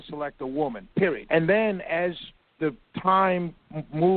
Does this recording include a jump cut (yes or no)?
yes